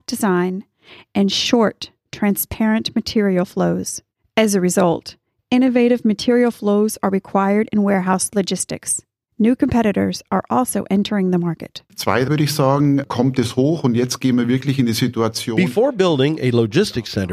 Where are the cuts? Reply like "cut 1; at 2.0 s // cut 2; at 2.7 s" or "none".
cut 1; at 12.3 s